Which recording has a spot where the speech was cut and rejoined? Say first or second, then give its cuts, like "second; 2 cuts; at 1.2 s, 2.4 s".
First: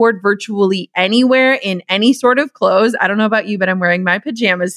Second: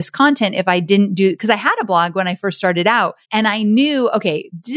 second; 1 cut; at 3.2 s